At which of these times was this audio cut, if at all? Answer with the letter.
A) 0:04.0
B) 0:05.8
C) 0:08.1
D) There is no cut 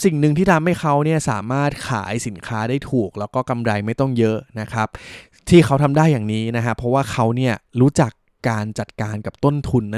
D